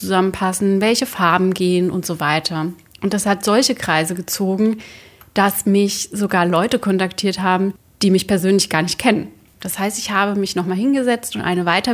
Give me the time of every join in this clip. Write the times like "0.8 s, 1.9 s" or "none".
9.5 s